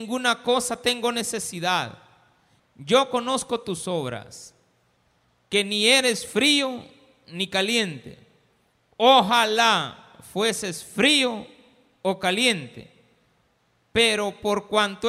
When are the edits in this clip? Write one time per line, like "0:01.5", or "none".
0:02.6